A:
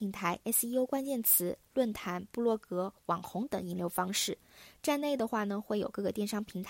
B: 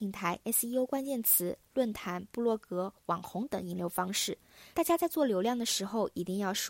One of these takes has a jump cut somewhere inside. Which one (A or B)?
B